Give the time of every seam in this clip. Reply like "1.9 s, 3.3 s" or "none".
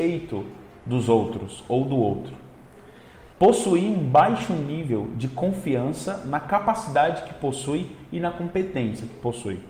3.3 s